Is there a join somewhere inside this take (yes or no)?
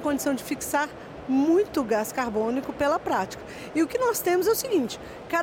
no